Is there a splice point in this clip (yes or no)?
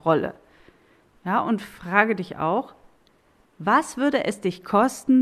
no